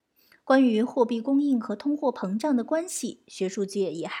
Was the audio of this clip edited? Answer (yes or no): no